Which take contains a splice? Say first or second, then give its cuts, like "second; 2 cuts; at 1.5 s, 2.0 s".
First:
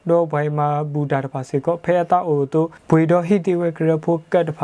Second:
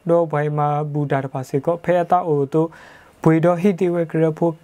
first; 1 cut; at 2.8 s